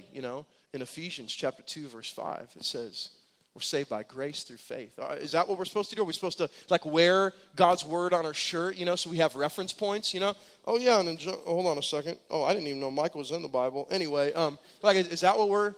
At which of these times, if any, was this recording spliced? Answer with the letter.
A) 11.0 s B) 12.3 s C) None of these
B